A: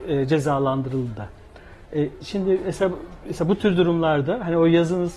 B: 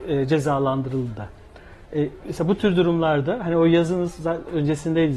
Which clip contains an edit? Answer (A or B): B